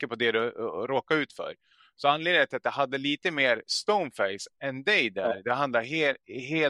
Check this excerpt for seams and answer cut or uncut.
uncut